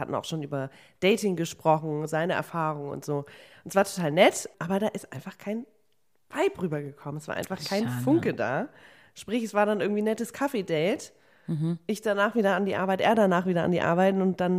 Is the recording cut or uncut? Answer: uncut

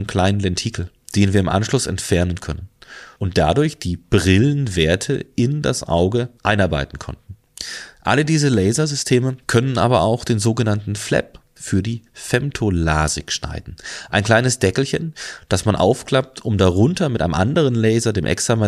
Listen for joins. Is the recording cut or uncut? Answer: uncut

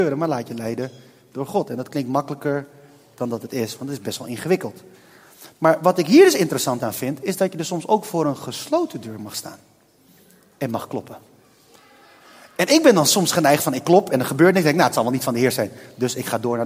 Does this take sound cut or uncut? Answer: uncut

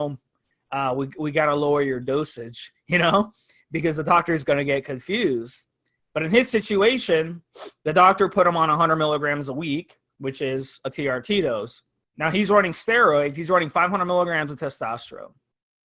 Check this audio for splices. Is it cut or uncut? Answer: cut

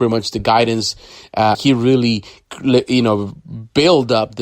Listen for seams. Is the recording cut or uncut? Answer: cut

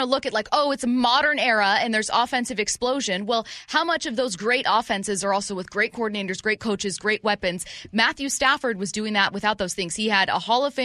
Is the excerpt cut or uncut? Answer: uncut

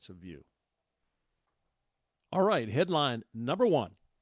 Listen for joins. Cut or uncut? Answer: uncut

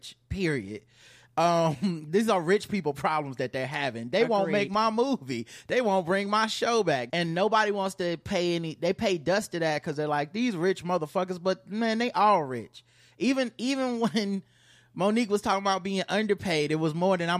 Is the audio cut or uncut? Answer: cut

